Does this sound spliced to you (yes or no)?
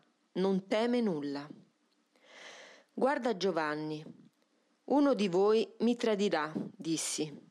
no